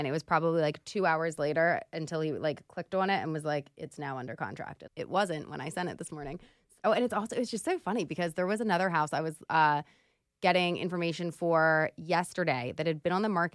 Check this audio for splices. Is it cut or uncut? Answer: cut